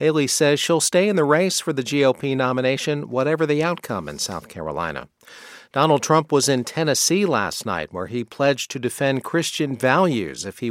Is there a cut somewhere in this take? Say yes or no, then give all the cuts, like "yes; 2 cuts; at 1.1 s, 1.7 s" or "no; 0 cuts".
no; 0 cuts